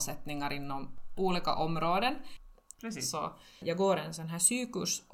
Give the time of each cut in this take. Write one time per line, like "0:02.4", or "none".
0:02.7